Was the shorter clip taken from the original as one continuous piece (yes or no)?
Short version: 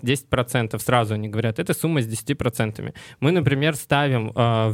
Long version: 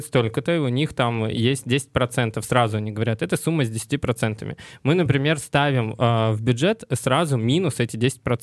yes